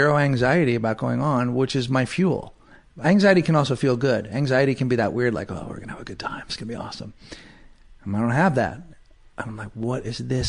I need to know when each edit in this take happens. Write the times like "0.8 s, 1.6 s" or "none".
none